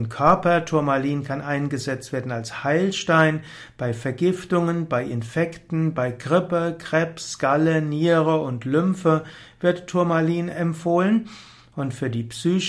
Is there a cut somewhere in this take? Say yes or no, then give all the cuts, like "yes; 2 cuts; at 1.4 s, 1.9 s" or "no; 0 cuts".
no; 0 cuts